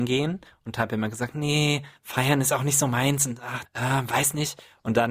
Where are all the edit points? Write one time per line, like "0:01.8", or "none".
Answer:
0:02.0
0:03.6